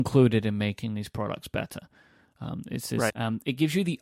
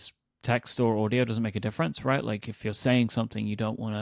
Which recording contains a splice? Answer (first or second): first